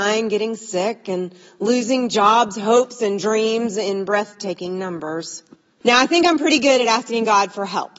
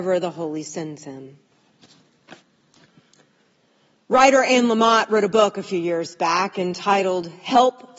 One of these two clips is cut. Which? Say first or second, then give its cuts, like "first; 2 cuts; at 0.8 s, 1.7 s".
first; 1 cut; at 5.8 s